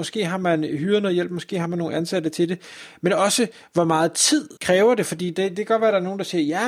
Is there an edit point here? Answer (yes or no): yes